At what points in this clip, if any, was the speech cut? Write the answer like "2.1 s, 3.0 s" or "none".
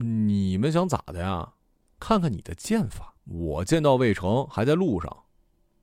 1.8 s, 3.2 s